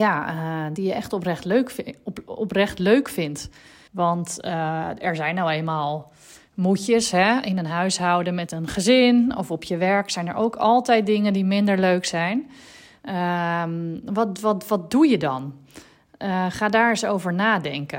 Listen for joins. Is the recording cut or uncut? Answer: cut